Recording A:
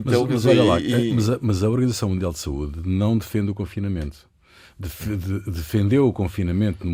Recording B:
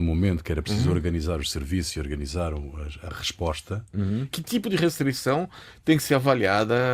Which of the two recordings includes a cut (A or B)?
B